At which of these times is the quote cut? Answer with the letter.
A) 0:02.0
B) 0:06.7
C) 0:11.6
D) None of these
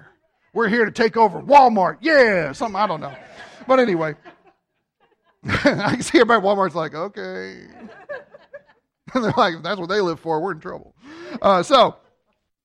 D